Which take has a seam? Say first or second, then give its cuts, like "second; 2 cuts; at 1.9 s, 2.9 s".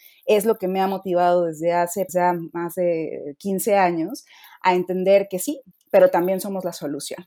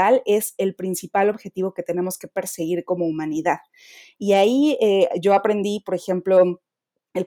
first; 2 cuts; at 2.1 s, 5.7 s